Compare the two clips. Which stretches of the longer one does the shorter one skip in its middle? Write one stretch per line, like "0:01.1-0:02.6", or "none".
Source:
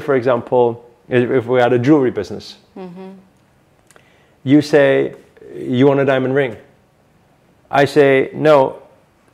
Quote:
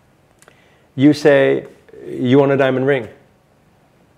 none